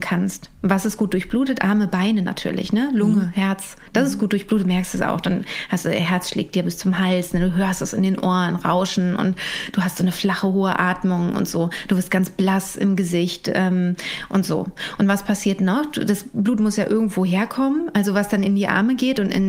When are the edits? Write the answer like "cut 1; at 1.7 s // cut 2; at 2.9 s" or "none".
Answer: none